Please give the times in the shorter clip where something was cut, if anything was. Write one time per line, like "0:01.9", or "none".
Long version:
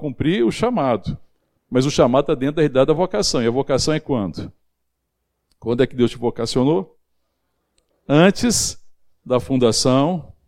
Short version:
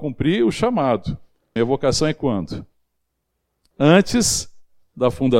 0:01.6
0:03.7